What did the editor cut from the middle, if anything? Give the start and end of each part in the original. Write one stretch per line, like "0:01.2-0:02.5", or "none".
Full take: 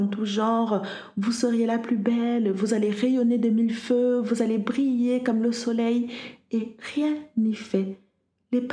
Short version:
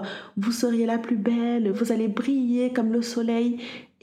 0:02.5-0:04.2